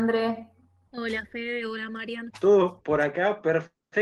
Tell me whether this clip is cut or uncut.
cut